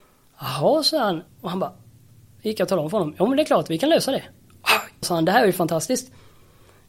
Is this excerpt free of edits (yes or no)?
no